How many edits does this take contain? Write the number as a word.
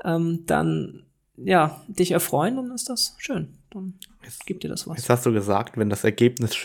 zero